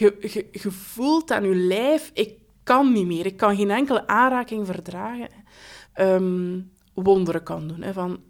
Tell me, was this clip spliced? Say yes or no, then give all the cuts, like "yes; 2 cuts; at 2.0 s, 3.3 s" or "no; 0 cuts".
yes; 1 cut; at 5.8 s